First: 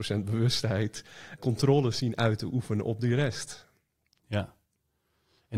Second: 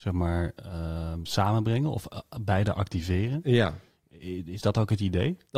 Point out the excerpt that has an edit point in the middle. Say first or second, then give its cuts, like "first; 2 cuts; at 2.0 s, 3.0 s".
first; 1 cut; at 1.4 s